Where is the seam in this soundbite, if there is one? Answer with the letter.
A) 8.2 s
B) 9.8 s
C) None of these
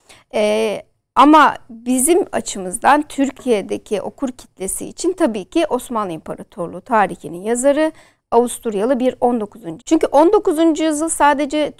B